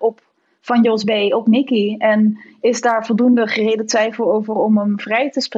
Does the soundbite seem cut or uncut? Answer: uncut